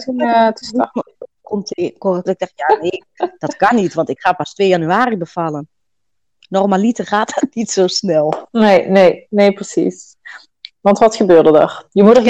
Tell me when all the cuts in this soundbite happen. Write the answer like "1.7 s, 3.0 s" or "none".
2.3 s